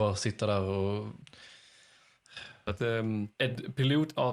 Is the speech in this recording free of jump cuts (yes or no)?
no